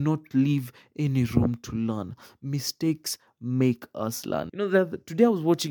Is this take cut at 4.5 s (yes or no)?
yes